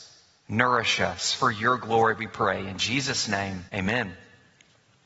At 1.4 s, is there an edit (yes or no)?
no